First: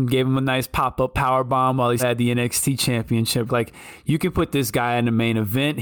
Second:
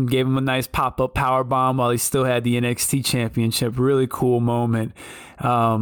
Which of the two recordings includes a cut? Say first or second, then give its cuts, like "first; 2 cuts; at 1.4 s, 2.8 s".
first; 2 cuts; at 2.0 s, 3.5 s